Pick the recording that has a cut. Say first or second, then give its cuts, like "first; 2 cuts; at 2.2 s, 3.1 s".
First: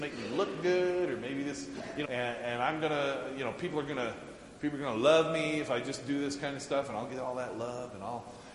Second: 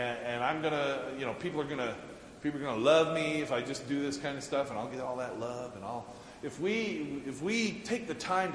first; 1 cut; at 2.0 s